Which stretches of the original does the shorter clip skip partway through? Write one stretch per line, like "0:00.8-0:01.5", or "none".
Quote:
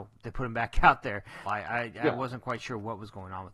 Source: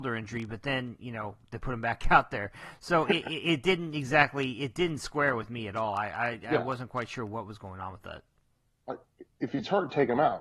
0:02.7-0:05.9